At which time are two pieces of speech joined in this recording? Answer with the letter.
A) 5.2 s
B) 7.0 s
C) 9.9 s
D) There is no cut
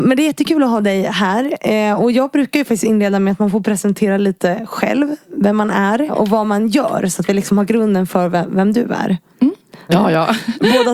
C